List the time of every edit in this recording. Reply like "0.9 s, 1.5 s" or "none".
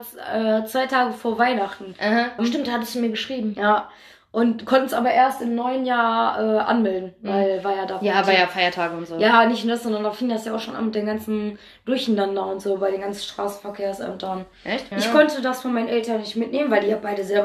2.4 s, 14.9 s